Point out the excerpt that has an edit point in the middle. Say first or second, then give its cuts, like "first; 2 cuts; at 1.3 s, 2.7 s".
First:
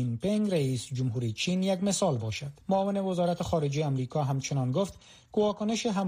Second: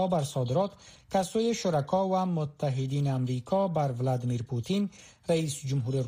first; 1 cut; at 2.6 s